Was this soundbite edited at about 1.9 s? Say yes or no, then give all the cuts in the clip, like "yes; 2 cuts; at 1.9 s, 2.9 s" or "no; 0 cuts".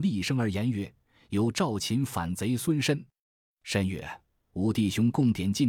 no; 1 cut; at 3.2 s